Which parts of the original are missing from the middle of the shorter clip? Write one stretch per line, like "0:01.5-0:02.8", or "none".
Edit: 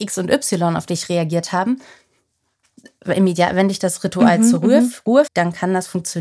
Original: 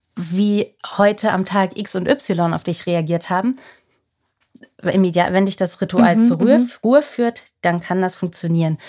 0:07.0-0:07.5